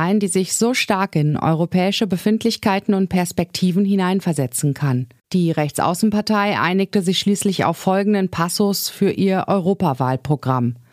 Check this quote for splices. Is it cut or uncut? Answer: cut